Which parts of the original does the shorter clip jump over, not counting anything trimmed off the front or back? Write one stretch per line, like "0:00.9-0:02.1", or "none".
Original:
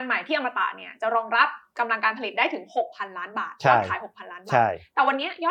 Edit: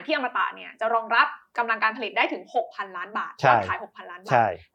none